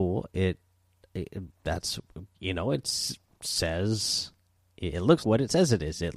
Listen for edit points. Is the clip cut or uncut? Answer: cut